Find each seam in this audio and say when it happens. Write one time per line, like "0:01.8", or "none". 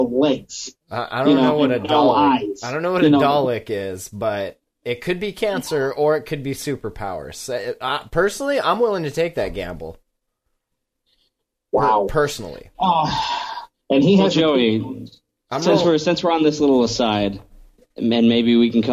none